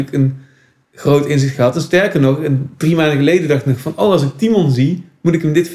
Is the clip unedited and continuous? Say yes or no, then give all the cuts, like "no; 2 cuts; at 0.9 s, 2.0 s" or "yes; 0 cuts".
yes; 0 cuts